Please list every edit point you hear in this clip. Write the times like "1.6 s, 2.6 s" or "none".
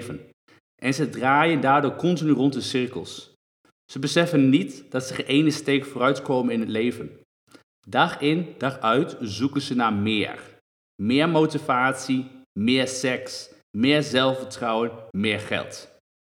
15.1 s